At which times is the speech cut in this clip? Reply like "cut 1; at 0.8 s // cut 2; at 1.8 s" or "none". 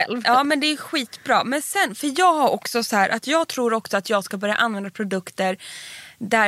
none